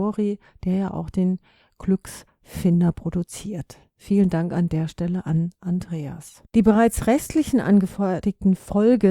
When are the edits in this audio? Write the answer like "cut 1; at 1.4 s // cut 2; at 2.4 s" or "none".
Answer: cut 1; at 6.4 s